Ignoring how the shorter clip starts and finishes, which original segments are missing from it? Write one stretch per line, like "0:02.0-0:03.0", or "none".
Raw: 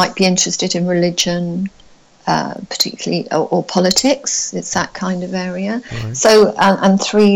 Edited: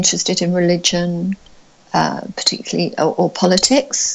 none